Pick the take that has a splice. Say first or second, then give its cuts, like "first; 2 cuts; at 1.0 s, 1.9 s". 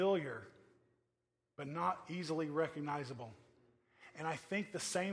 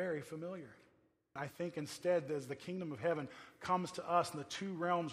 second; 1 cut; at 1.4 s